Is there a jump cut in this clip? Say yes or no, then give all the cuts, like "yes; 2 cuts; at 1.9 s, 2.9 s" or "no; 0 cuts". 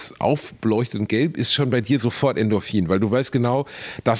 no; 0 cuts